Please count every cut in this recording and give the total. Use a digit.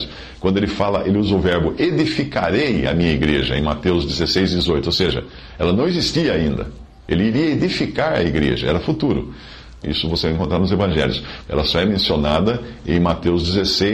2